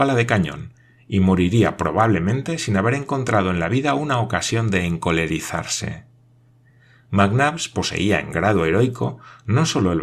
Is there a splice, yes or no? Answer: no